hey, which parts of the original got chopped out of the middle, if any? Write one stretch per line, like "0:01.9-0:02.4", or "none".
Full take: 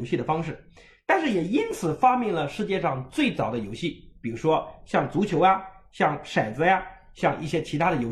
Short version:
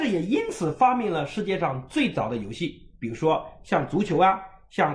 none